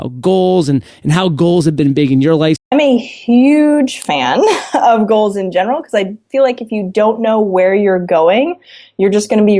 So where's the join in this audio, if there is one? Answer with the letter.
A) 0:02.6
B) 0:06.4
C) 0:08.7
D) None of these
A